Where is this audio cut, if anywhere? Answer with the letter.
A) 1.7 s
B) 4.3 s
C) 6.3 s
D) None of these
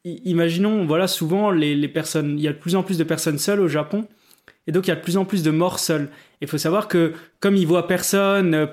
D